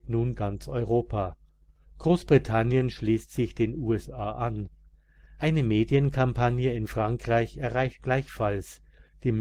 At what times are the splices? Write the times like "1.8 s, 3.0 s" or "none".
none